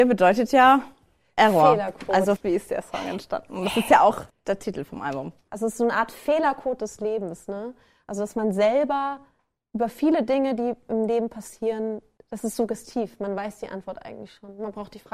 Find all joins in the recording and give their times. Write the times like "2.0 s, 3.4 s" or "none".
2.4 s